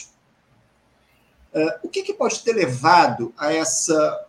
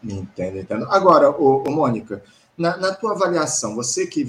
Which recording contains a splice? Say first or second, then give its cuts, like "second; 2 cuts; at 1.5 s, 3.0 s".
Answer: first; 1 cut; at 1.5 s